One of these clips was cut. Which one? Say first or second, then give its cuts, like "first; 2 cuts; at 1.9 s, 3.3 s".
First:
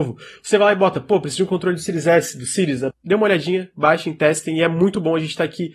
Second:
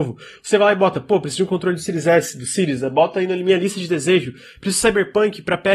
first; 1 cut; at 2.9 s